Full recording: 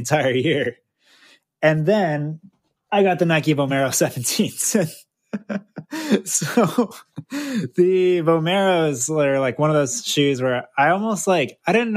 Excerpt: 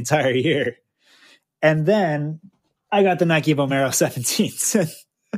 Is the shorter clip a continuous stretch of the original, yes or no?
yes